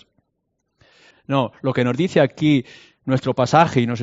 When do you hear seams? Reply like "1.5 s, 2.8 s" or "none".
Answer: 1.1 s